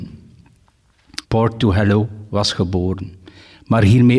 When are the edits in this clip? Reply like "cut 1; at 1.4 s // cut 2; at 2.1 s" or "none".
cut 1; at 1.2 s

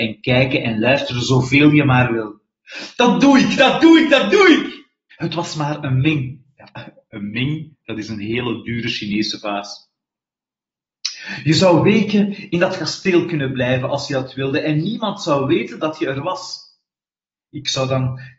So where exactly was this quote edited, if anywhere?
cut 1; at 5.1 s

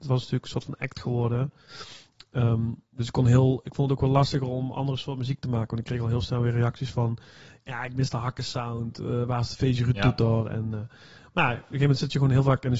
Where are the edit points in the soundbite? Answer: none

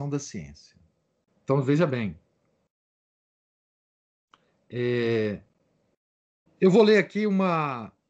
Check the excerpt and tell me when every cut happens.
cut 1; at 1.3 s // cut 2; at 6.5 s

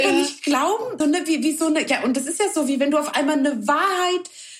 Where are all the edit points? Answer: cut 1; at 1.0 s

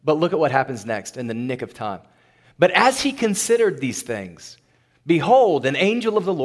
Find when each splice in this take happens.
none

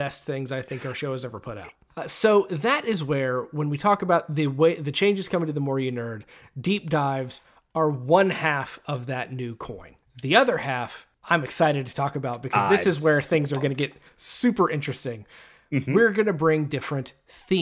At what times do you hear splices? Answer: none

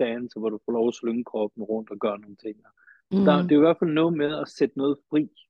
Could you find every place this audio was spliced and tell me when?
none

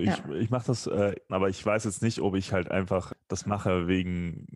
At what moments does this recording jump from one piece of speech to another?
cut 1; at 1.3 s

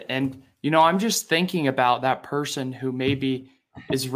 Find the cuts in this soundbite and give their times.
none

